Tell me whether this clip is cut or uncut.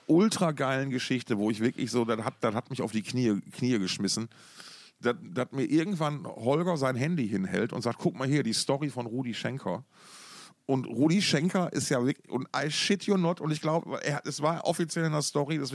uncut